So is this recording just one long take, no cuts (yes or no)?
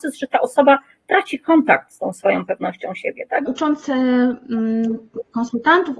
no